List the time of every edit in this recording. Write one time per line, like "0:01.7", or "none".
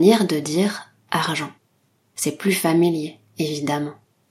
none